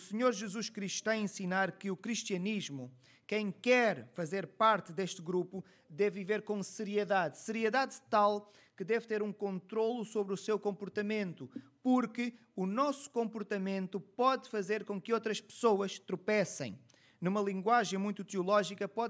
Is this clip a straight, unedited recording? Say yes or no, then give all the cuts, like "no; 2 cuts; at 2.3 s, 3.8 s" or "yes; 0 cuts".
yes; 0 cuts